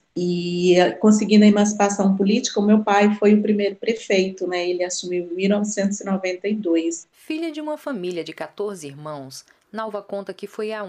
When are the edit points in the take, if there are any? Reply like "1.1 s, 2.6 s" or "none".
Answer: none